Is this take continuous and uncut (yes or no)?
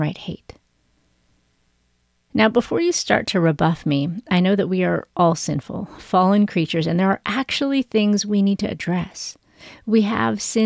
yes